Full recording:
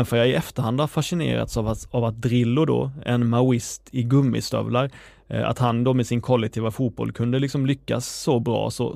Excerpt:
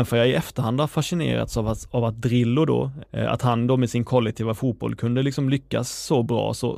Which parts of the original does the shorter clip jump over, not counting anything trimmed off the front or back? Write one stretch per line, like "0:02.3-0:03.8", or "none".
0:03.0-0:05.2